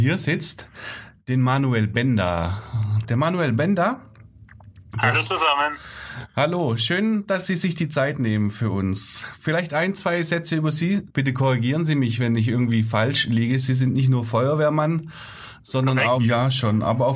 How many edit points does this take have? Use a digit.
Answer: 2